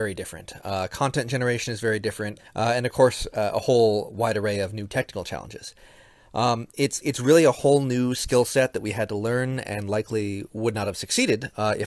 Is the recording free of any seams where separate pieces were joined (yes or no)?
no